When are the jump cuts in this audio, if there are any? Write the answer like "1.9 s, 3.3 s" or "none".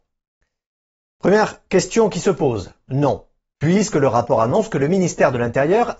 2.9 s